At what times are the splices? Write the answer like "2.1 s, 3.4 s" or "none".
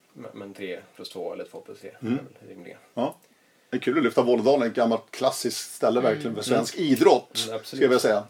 none